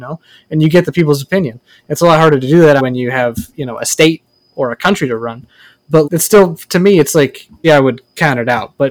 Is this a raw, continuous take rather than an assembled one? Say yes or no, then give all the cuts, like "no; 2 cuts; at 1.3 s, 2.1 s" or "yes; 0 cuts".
no; 3 cuts; at 2.8 s, 6.0 s, 7.6 s